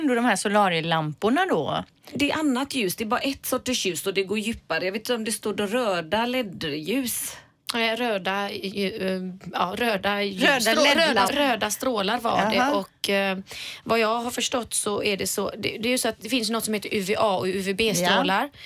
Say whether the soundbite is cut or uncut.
cut